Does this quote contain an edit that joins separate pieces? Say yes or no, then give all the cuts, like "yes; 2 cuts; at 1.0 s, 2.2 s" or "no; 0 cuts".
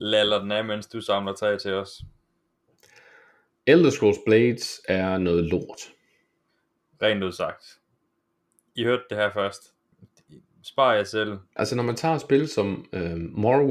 yes; 2 cuts; at 9.9 s, 11.6 s